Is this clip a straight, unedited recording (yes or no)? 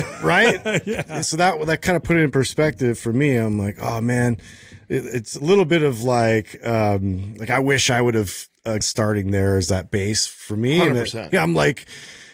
no